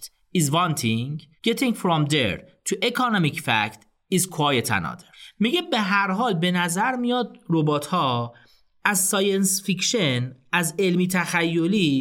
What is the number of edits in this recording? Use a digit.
0